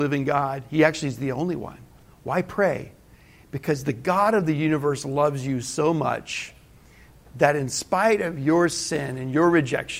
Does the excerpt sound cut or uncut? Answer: uncut